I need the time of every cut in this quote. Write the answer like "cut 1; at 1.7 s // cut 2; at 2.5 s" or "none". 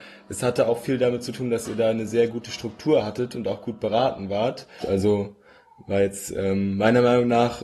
cut 1; at 4.8 s